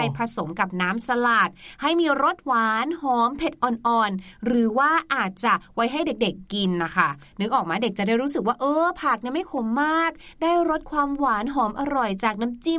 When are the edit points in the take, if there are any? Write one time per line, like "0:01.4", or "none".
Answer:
none